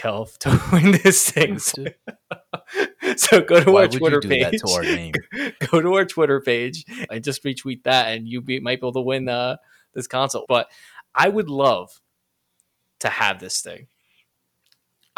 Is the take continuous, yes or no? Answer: no